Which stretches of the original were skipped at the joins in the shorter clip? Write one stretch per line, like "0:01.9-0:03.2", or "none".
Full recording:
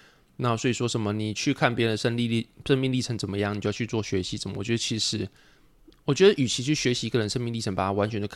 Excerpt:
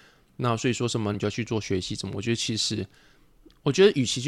0:01.1-0:03.6